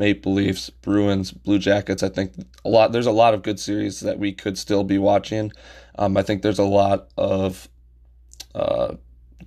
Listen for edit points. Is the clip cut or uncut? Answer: uncut